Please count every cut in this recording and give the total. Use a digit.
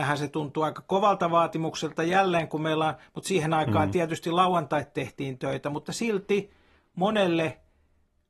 0